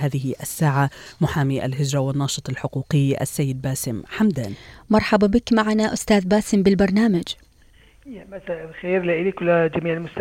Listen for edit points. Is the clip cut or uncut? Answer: uncut